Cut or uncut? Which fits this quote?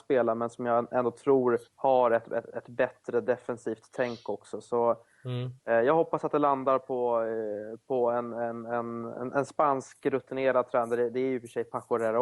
cut